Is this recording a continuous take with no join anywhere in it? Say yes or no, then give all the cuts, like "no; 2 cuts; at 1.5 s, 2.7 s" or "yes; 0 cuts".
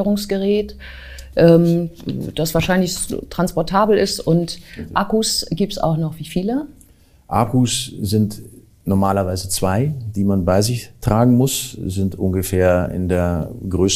yes; 0 cuts